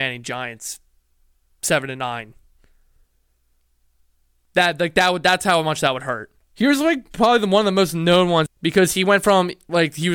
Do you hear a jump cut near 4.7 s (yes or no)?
no